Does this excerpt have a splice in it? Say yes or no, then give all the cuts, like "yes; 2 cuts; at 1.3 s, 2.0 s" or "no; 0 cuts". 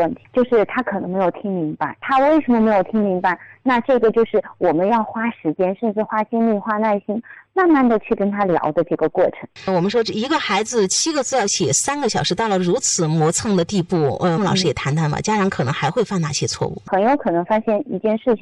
yes; 1 cut; at 14.4 s